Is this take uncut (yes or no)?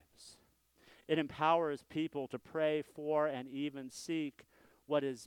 yes